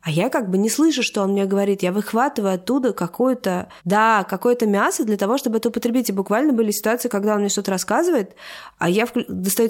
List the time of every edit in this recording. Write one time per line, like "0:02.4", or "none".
0:03.8

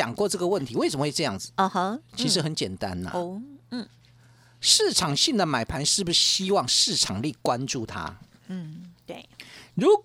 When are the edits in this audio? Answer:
none

